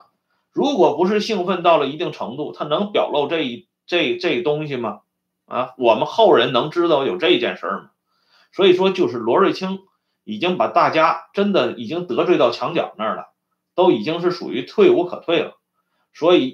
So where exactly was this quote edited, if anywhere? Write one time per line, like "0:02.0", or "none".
none